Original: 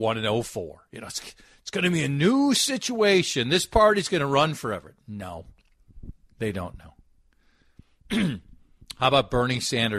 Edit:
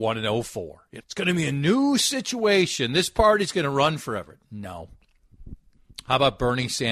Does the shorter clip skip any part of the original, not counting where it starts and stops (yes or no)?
yes